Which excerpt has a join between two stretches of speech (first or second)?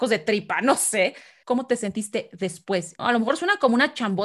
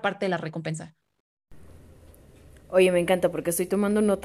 first